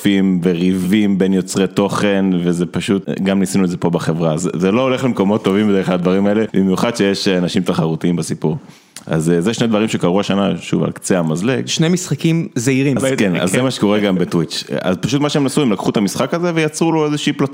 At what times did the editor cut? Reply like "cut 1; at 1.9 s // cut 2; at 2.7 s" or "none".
cut 1; at 13.0 s